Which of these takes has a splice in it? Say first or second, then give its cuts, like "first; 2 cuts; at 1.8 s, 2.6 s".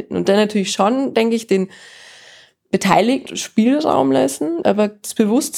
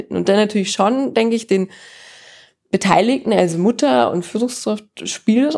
first; 2 cuts; at 3.3 s, 4.6 s